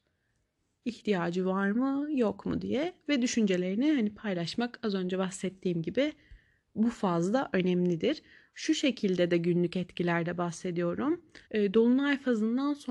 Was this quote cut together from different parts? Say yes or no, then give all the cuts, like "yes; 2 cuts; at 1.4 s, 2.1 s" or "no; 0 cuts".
yes; 1 cut; at 11.4 s